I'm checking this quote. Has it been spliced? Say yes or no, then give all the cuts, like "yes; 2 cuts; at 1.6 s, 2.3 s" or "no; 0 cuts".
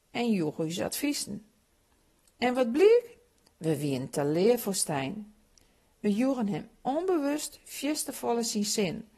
no; 0 cuts